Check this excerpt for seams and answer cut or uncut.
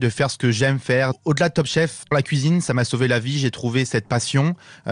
uncut